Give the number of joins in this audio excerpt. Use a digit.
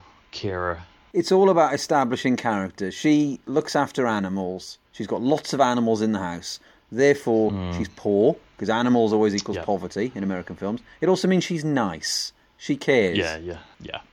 1